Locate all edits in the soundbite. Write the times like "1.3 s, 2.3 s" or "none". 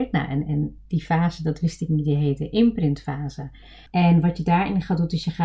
3.9 s